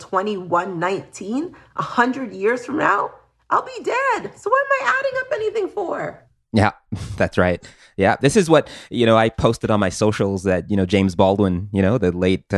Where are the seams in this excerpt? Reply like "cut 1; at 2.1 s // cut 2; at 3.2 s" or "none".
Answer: none